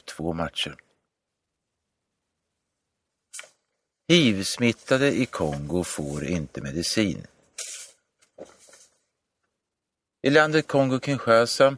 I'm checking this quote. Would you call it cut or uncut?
uncut